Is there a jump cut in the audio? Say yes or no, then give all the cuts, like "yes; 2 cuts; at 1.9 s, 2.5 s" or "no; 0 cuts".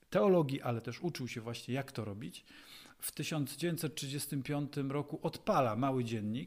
no; 0 cuts